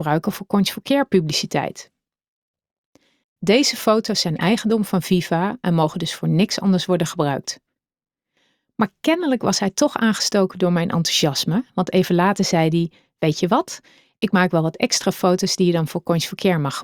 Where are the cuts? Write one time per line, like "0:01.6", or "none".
0:03.2